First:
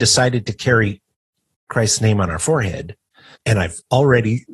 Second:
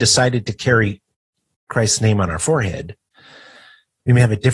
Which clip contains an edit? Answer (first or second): first